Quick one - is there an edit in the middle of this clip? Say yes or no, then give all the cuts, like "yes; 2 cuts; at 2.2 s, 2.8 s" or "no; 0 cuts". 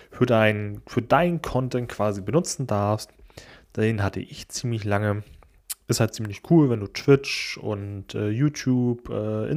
no; 0 cuts